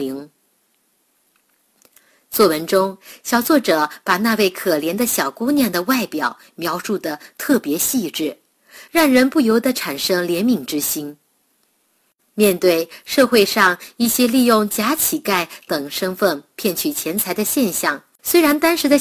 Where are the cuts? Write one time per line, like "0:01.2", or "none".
none